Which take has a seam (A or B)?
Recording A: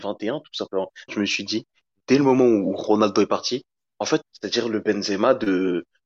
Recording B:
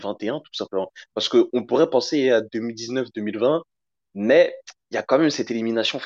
A